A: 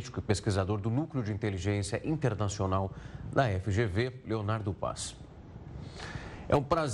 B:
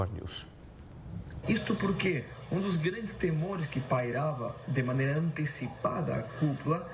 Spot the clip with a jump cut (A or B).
B